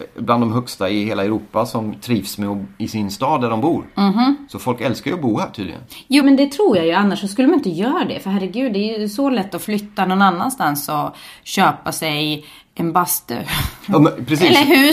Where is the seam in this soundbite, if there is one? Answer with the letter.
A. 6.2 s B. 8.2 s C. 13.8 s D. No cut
A